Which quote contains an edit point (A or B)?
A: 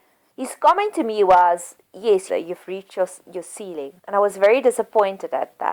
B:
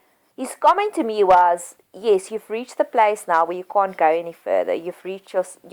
A